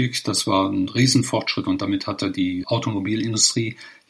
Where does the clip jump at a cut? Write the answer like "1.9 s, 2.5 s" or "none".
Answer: 2.6 s